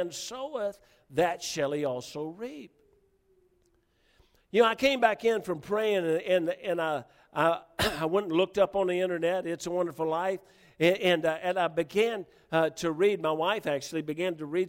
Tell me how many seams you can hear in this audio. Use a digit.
0